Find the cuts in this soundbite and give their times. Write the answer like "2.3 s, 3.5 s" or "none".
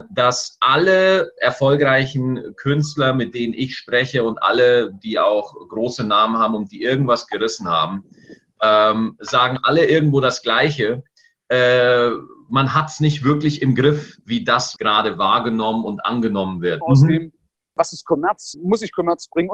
14.8 s, 16.8 s, 18.5 s